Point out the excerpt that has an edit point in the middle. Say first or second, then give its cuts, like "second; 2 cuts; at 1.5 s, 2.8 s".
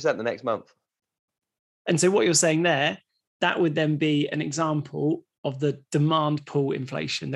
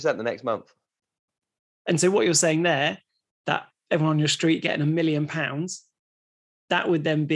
first; 1 cut; at 3.3 s